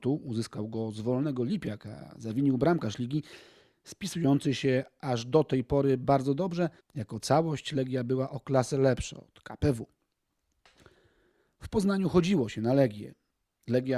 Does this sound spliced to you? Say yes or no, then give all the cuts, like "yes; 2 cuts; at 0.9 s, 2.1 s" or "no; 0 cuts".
yes; 1 cut; at 6.8 s